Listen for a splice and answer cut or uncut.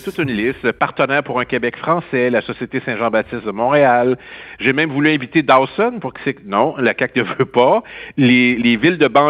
uncut